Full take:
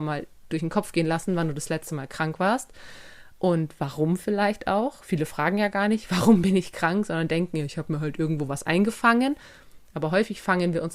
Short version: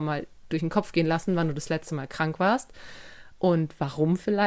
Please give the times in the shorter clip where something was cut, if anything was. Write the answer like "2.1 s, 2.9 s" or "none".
none